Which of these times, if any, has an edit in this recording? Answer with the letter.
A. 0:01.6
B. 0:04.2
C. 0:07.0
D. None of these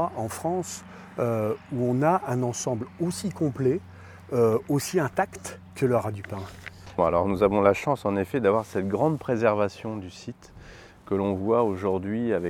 C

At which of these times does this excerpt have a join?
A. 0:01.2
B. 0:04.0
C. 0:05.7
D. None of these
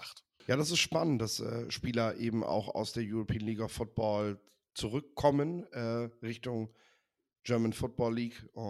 D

